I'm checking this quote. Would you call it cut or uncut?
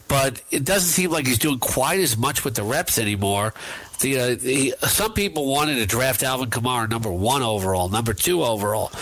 uncut